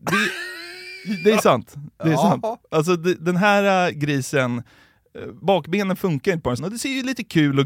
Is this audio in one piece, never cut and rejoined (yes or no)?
no